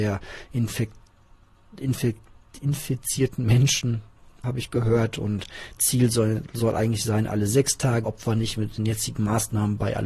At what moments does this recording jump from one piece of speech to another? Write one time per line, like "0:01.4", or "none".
0:04.4
0:08.0